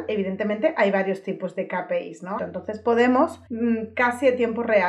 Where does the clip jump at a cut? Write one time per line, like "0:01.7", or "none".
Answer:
0:02.4
0:03.5